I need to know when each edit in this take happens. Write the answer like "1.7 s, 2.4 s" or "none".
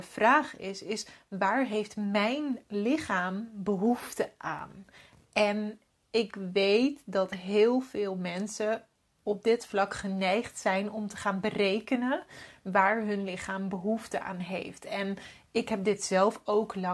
none